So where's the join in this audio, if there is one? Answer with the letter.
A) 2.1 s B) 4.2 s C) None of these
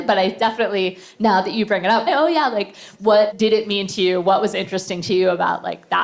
A